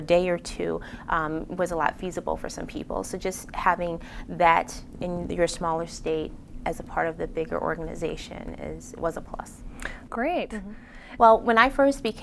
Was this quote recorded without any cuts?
no; 2 cuts; at 10.1 s, 11.2 s

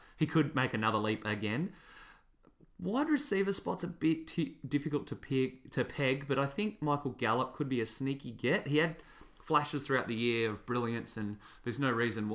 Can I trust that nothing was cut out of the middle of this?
yes; 0 cuts

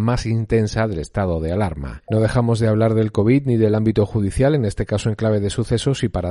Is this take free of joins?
no; 1 cut; at 2.1 s

